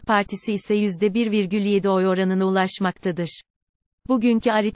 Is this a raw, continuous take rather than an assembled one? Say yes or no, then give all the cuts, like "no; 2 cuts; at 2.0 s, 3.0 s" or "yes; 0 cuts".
yes; 0 cuts